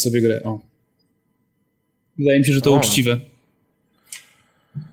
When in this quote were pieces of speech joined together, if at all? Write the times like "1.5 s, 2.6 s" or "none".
none